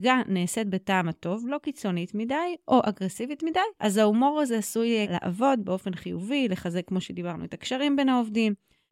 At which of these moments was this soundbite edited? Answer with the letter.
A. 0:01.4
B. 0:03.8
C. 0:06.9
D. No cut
B